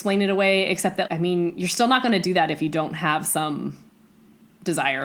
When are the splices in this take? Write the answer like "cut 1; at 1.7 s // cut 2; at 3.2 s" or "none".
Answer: cut 1; at 1.1 s